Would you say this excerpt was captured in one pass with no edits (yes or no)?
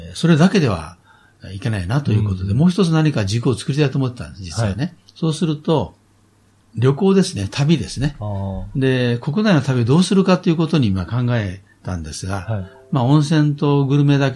yes